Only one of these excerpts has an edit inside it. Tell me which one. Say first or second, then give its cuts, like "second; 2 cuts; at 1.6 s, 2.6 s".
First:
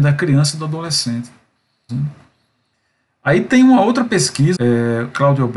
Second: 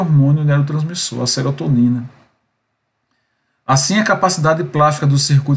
first; 2 cuts; at 1.9 s, 4.5 s